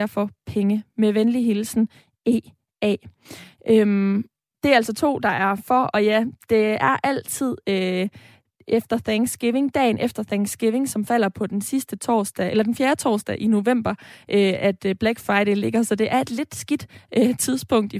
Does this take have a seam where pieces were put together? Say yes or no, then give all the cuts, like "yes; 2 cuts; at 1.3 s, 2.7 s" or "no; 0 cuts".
no; 0 cuts